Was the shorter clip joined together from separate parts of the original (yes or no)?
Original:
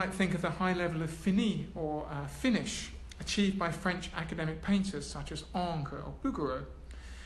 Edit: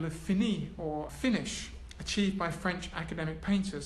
yes